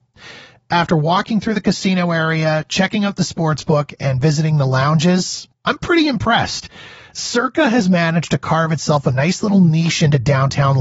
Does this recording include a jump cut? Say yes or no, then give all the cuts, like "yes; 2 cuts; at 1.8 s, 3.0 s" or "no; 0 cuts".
no; 0 cuts